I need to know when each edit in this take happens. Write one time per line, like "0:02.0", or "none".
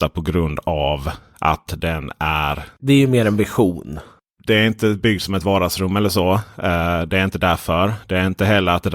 none